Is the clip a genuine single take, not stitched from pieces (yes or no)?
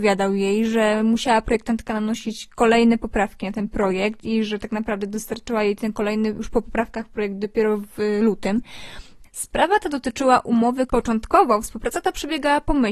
no